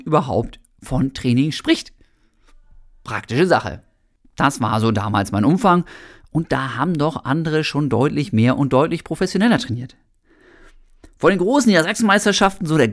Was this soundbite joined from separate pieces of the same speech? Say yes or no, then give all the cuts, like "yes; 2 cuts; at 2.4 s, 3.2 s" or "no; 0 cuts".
yes; 1 cut; at 4.2 s